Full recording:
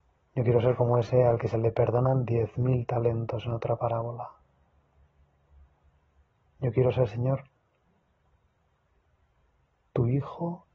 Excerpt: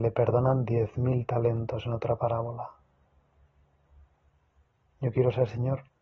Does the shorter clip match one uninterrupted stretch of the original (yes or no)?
yes